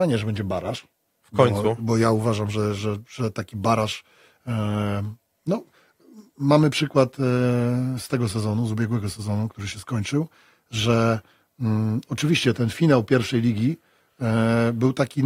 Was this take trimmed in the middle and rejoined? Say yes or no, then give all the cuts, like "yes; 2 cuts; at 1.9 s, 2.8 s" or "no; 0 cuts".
no; 0 cuts